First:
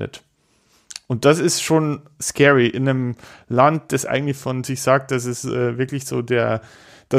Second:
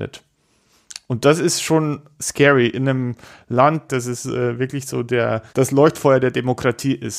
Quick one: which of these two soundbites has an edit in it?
second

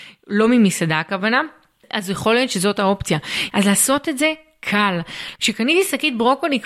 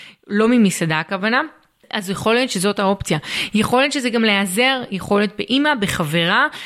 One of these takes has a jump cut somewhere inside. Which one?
first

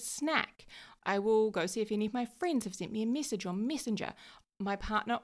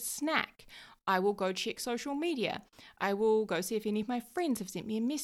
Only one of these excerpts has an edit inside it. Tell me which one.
first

